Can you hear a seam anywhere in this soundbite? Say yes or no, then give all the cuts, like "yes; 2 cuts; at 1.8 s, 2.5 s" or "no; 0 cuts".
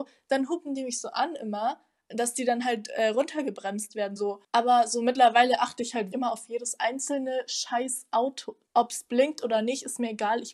yes; 2 cuts; at 4.2 s, 6.1 s